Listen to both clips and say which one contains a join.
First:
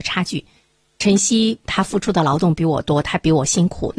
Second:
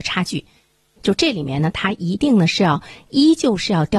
second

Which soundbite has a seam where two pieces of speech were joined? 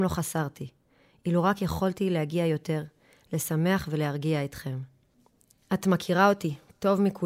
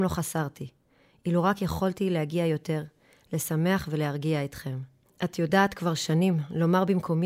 second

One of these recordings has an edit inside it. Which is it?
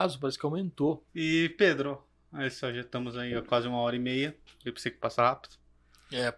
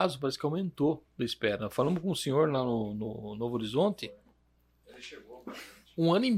first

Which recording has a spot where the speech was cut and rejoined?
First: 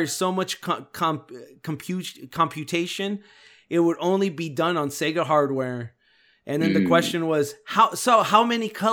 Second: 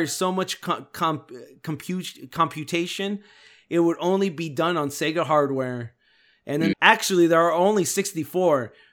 second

